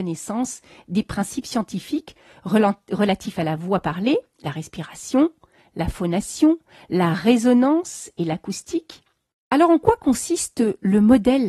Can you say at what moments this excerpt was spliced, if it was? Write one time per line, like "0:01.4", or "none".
0:09.3